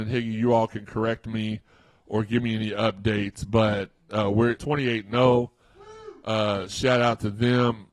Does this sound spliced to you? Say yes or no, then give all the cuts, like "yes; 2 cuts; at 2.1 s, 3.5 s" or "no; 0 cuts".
yes; 1 cut; at 4.6 s